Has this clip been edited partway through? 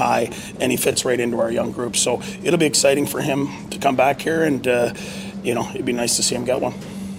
no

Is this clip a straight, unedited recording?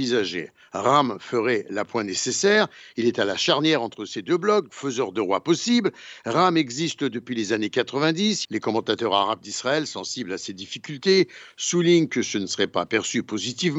no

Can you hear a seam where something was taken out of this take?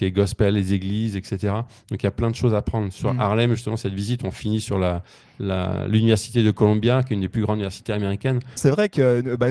yes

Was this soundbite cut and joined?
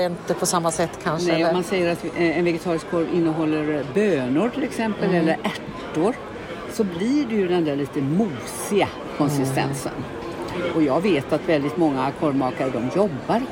no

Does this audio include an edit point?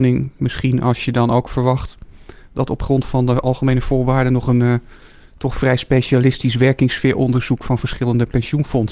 no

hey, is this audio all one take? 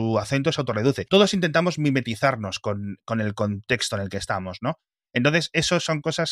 yes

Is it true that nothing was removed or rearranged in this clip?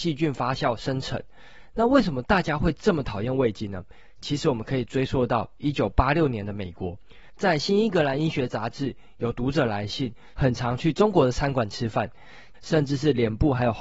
no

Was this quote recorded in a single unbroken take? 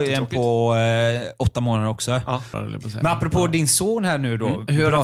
no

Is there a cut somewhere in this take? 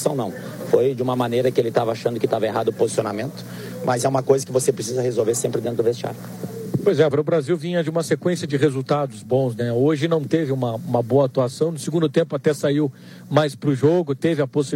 yes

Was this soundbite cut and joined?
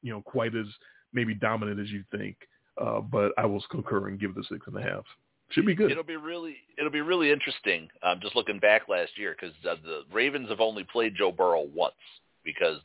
no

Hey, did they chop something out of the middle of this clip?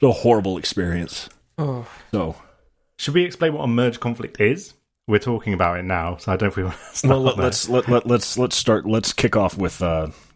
no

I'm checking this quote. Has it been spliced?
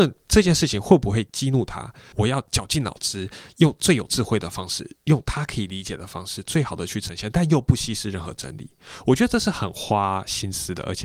yes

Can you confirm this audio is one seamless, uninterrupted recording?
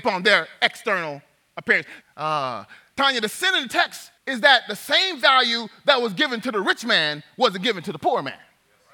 no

